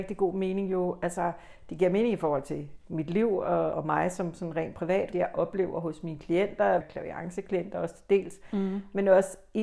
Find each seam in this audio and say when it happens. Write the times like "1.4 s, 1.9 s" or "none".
3.7 s, 5.1 s, 6.8 s